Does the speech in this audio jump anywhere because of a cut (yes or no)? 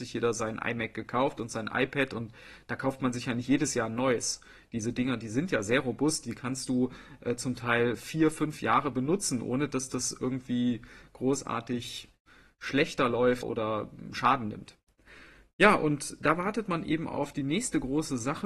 yes